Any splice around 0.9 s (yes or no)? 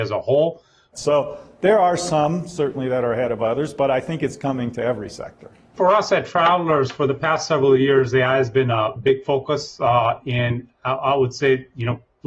yes